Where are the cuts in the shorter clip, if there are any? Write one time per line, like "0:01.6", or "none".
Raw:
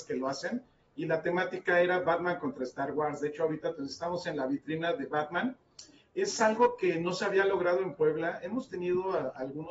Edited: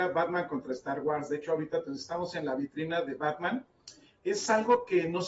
none